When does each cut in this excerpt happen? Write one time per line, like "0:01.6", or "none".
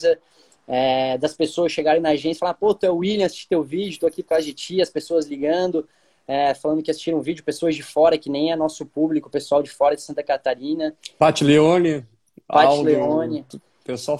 none